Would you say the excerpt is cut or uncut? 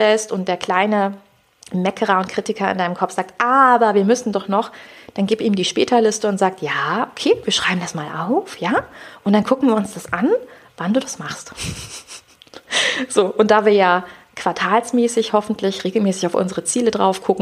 uncut